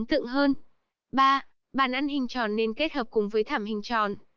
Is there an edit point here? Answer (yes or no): yes